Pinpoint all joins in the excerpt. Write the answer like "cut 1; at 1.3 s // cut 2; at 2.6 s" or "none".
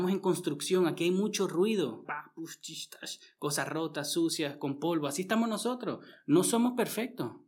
cut 1; at 2.1 s